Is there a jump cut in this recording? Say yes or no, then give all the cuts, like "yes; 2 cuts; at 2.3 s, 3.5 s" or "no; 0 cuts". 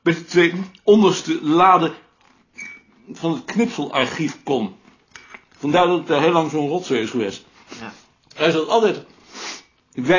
no; 0 cuts